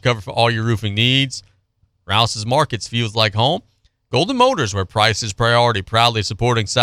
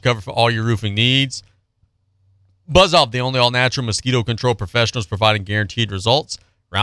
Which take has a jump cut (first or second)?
first